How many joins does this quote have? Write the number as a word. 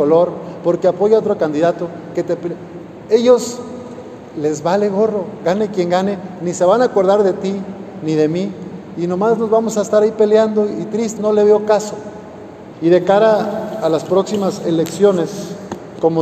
two